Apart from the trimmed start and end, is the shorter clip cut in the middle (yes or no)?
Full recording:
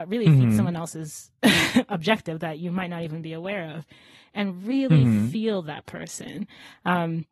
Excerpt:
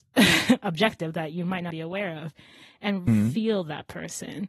yes